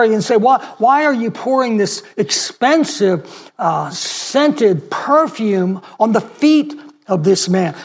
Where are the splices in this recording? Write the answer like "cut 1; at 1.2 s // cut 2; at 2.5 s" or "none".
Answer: none